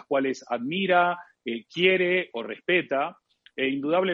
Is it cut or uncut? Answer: uncut